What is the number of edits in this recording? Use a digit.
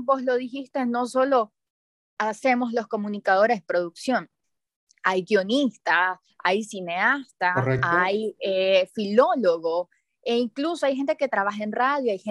0